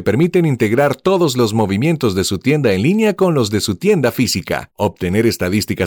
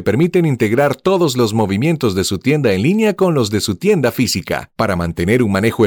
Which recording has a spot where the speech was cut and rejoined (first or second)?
first